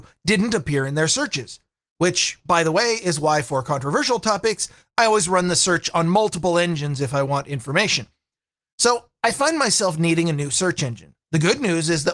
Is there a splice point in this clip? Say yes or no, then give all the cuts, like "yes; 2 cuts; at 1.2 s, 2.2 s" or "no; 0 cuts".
no; 0 cuts